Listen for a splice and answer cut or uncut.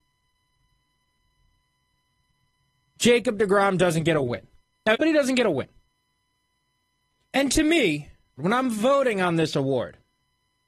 cut